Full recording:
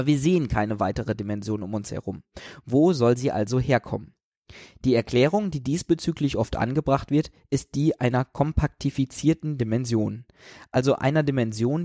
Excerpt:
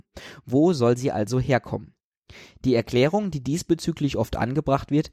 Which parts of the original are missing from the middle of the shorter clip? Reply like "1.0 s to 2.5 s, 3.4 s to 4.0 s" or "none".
none